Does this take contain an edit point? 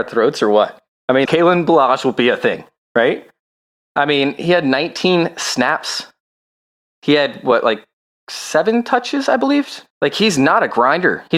yes; 2 cuts; at 1.2 s, 9.9 s

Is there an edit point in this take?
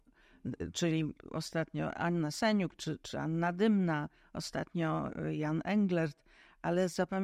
yes; 1 cut; at 3.0 s

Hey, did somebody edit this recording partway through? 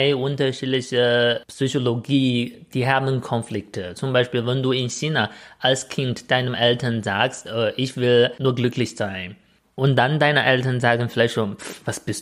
no; 0 cuts

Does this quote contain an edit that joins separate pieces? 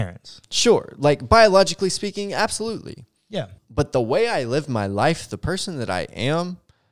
yes; 1 cut; at 3.6 s

